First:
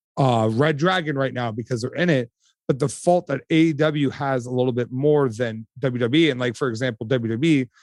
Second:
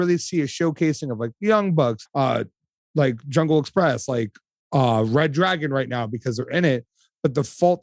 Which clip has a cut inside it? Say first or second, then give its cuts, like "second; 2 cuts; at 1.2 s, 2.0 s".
second; 1 cut; at 2.1 s